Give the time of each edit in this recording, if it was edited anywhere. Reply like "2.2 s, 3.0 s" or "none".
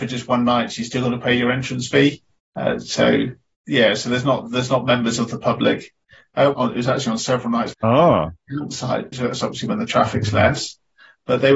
6.5 s, 7.7 s, 9.1 s